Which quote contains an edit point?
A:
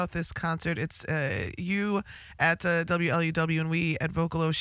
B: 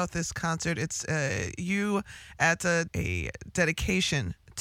B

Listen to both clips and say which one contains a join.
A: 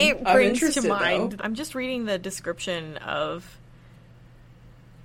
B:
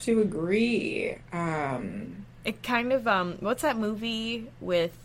A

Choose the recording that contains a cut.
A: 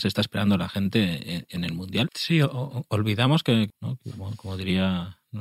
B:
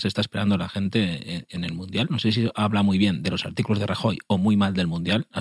A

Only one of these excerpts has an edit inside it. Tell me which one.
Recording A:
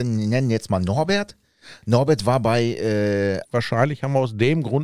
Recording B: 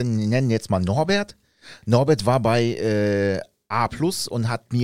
A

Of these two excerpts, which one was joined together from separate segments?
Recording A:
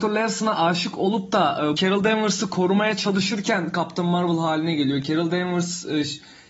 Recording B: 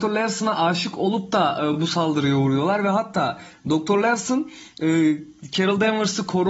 A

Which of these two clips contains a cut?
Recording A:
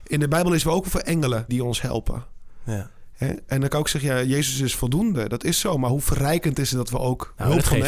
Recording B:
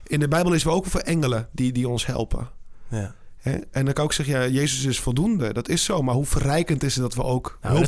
A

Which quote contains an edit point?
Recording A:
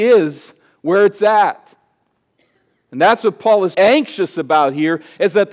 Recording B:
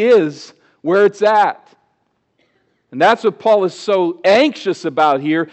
A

